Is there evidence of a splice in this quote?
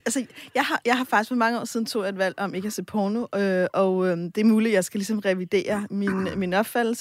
no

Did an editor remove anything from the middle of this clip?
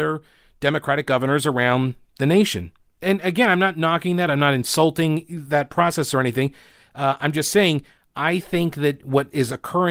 no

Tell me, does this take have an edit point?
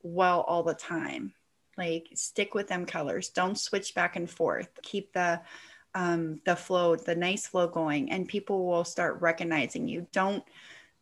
yes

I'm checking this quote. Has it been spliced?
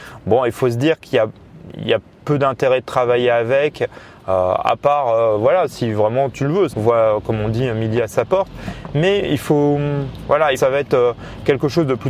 yes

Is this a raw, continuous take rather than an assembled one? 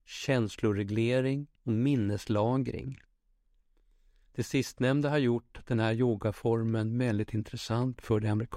no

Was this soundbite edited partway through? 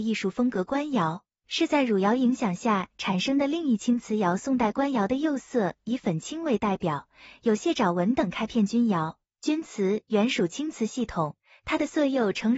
no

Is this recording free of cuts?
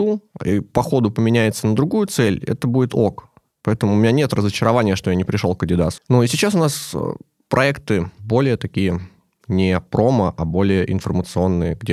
no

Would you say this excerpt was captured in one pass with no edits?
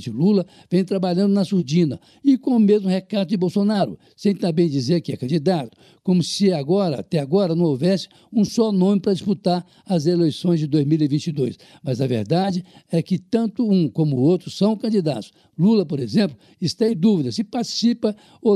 yes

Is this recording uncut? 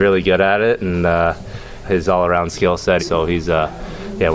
no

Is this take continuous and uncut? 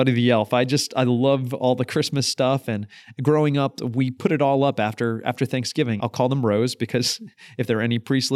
no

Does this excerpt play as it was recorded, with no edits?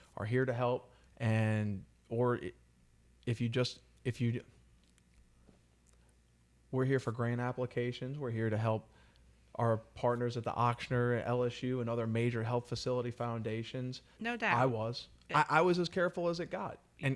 no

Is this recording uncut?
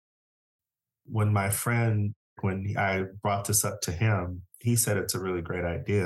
yes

